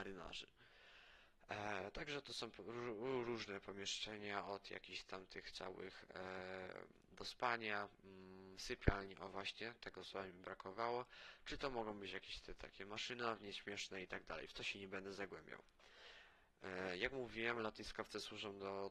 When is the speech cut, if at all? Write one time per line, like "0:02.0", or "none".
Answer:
none

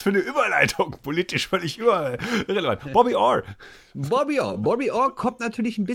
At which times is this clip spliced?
none

